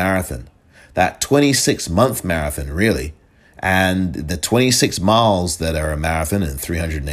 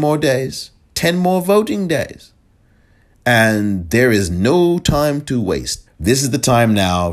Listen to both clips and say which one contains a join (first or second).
second